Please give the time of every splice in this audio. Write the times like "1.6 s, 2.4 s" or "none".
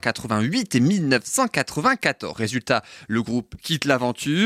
2.3 s